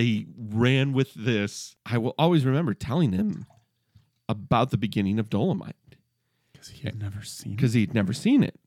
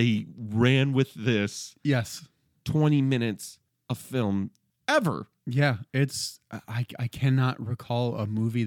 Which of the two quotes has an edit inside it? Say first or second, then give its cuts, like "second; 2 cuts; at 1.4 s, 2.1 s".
first; 1 cut; at 1.8 s